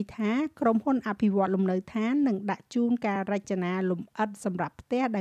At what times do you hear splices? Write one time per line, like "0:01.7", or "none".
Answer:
none